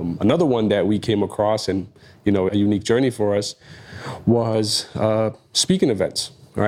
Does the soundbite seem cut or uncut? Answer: cut